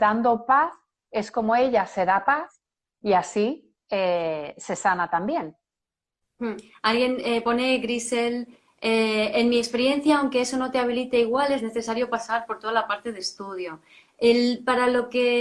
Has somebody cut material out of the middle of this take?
no; 0 cuts

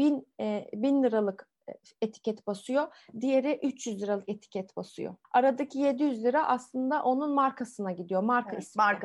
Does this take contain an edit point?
yes; 1 cut; at 5.2 s

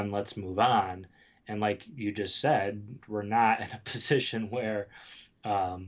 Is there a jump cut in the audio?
yes; 1 cut; at 3.0 s

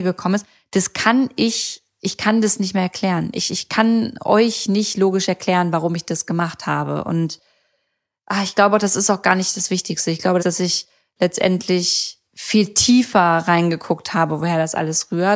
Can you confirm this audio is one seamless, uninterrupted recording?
no; 2 cuts; at 10.4 s, 12.2 s

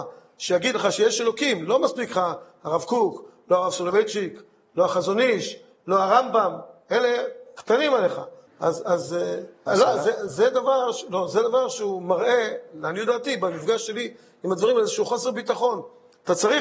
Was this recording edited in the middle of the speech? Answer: yes; 2 cuts; at 8.5 s, 9.7 s

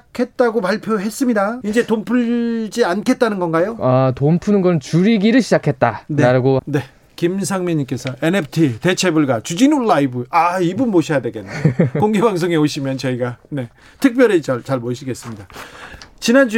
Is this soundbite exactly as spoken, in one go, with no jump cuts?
no; 2 cuts; at 1.6 s, 6.6 s

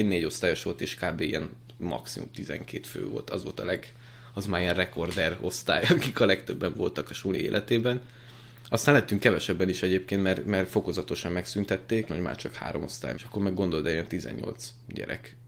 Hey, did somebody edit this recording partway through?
yes; 2 cuts; at 12.1 s, 13.1 s

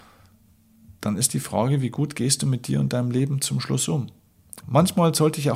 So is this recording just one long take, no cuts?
no; 1 cut; at 4.6 s

